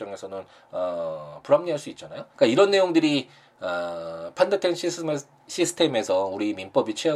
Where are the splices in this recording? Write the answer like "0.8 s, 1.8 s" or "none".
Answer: 2.3 s